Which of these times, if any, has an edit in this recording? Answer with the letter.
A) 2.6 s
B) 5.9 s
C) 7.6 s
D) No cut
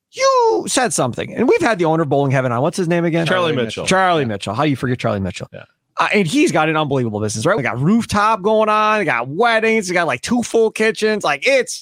C